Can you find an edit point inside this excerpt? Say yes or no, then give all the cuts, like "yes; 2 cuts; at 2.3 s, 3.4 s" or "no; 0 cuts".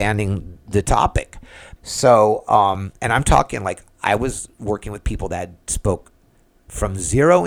yes; 1 cut; at 1.8 s